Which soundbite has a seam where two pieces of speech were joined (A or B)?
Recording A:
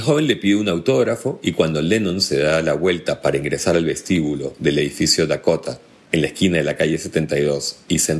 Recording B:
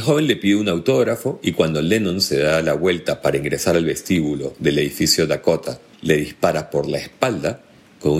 B